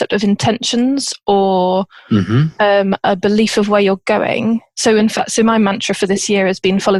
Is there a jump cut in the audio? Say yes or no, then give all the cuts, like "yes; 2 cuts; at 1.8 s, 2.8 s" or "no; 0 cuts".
no; 0 cuts